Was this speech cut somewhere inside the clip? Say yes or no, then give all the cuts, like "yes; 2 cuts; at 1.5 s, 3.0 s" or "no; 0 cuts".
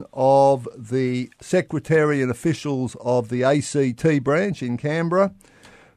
no; 0 cuts